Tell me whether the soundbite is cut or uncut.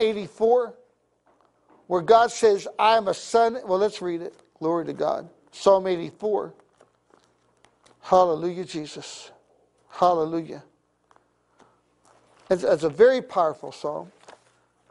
uncut